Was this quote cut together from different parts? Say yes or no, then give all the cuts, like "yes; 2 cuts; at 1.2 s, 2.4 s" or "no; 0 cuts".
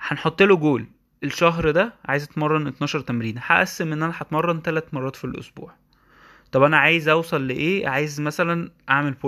no; 0 cuts